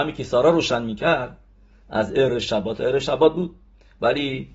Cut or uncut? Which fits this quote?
uncut